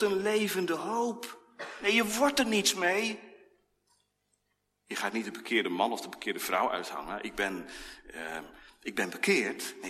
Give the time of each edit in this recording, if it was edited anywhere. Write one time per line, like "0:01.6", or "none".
none